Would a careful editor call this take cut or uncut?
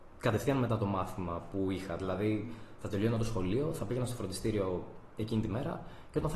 uncut